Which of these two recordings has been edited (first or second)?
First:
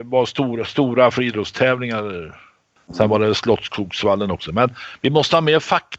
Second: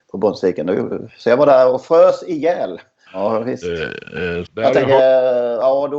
second